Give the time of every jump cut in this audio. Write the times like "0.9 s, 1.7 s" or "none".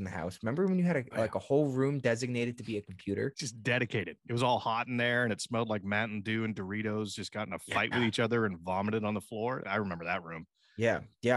9.6 s

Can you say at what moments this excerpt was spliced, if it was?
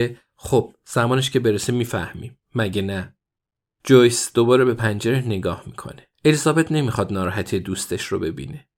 6.1 s

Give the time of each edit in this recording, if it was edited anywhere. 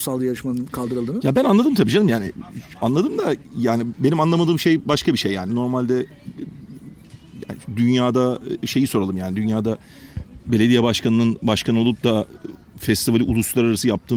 none

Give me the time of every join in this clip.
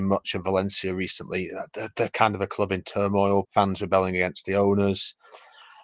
3.4 s

